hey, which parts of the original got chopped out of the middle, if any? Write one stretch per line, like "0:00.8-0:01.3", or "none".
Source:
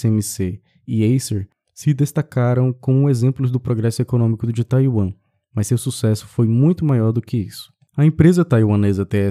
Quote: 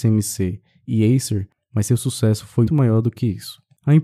0:01.6-0:05.4
0:06.5-0:06.8